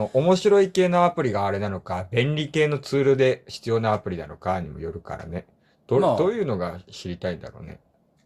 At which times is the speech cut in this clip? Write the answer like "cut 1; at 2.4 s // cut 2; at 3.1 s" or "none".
none